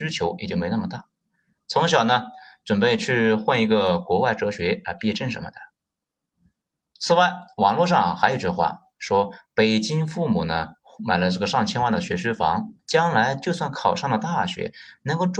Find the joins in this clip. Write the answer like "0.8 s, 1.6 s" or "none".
12.8 s